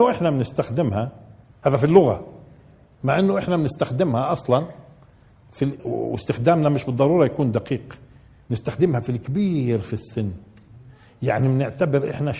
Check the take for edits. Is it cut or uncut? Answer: cut